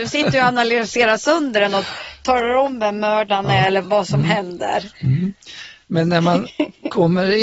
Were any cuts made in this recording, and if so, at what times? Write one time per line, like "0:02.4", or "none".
0:03.8